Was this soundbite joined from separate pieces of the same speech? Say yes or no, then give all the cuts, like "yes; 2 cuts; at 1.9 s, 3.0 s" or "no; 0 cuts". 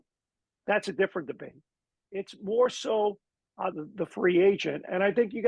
yes; 2 cuts; at 2.0 s, 3.7 s